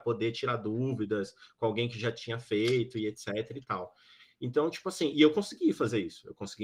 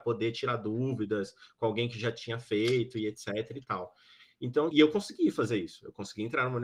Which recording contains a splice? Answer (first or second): second